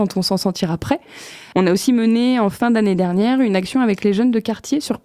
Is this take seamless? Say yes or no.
no